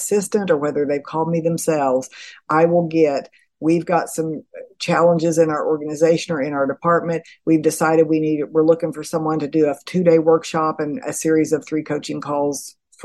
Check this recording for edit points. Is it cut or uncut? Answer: uncut